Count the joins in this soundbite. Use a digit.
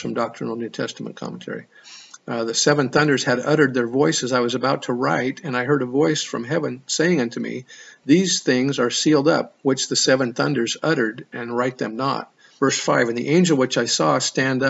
1